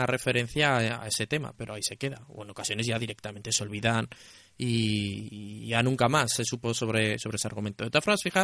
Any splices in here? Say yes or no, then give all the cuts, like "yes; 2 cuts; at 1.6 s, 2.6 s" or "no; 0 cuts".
no; 0 cuts